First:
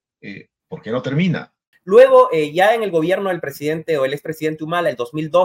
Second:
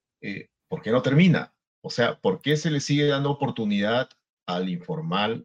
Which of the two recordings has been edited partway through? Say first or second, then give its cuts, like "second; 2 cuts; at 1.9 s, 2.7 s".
first; 1 cut; at 1.7 s